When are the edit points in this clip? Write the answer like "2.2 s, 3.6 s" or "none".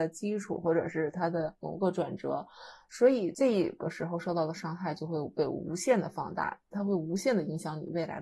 none